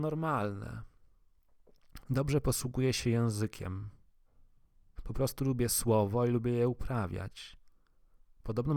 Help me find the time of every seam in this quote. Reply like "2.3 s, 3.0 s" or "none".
2.0 s, 5.0 s